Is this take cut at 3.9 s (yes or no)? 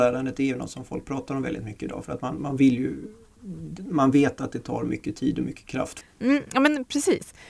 no